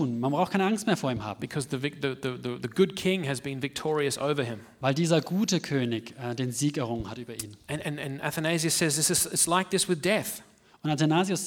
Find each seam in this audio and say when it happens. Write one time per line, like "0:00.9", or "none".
none